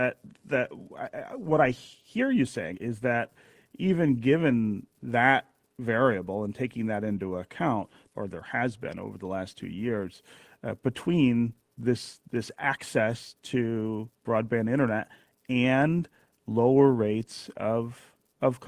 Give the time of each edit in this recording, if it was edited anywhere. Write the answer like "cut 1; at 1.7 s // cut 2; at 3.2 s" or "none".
cut 1; at 2.7 s // cut 2; at 8.1 s